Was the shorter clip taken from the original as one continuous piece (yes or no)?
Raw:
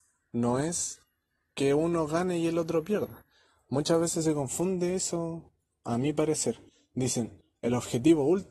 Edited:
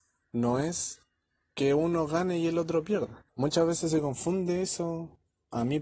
no